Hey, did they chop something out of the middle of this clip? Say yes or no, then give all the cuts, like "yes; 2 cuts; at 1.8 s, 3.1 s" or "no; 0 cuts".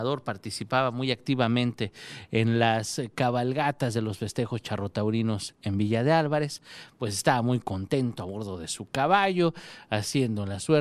no; 0 cuts